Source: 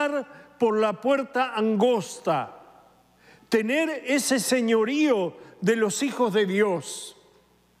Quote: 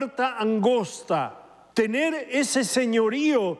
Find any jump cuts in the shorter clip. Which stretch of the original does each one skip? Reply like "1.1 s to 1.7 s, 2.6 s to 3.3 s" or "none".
2.9 s to 3.5 s